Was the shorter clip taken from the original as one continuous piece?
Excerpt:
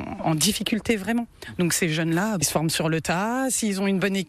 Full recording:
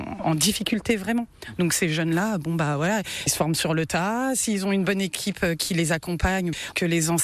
no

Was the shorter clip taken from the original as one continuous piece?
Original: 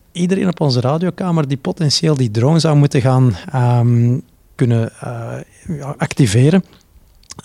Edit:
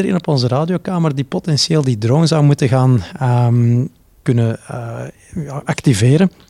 yes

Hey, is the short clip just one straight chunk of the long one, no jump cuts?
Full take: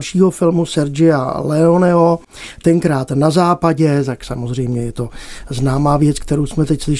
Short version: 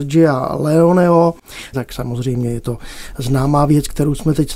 no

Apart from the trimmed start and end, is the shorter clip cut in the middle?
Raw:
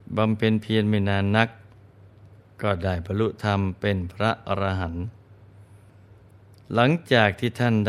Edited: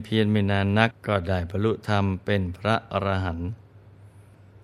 yes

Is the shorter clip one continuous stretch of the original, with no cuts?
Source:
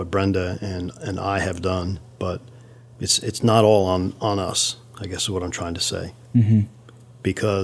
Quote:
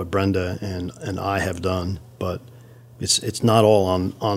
yes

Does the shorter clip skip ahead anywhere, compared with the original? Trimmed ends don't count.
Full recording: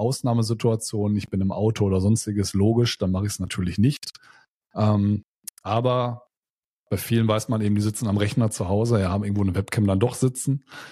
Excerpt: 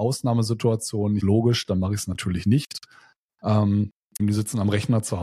yes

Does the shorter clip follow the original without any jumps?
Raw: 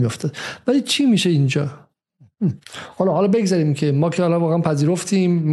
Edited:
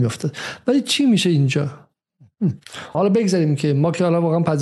no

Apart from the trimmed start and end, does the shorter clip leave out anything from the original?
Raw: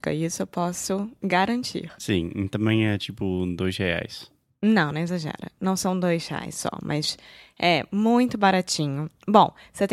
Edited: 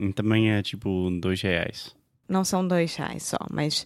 yes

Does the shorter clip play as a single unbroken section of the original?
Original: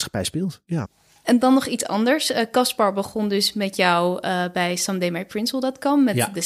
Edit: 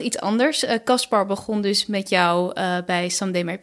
yes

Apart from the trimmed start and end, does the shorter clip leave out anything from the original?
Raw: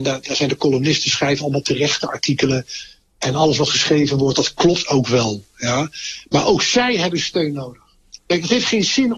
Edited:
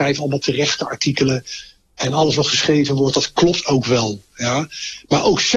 no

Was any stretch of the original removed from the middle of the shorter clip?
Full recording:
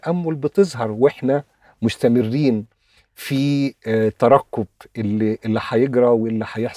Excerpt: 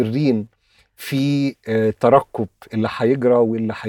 yes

